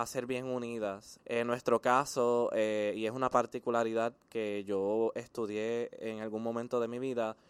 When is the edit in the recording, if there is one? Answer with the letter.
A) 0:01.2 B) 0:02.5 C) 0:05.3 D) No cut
A